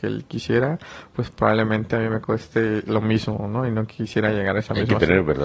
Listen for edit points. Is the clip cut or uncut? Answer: uncut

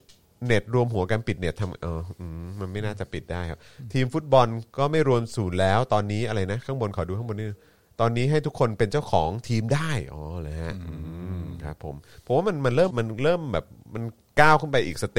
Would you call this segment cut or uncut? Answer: cut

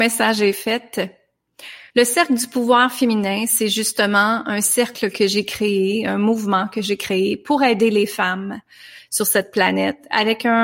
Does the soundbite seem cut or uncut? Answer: cut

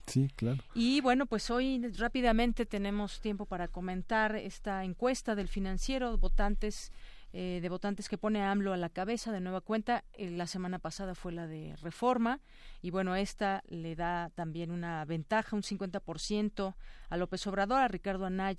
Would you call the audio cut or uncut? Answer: uncut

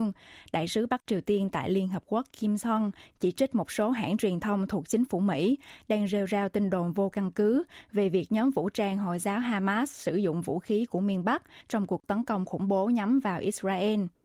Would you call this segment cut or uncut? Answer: uncut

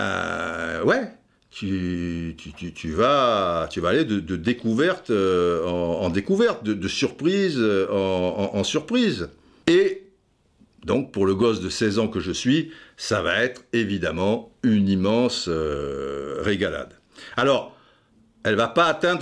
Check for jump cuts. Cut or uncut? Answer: uncut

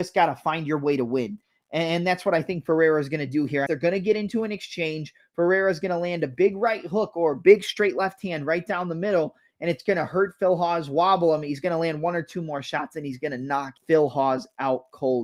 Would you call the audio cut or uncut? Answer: cut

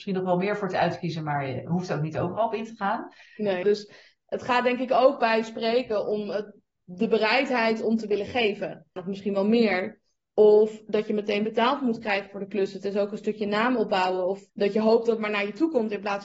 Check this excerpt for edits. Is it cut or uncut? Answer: cut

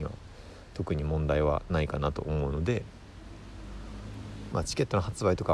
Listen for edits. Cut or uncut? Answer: cut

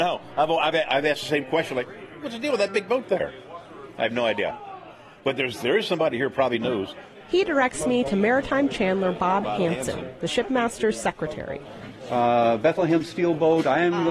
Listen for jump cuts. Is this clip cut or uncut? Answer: uncut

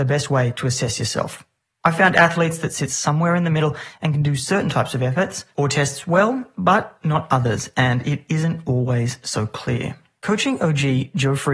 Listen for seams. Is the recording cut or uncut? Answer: uncut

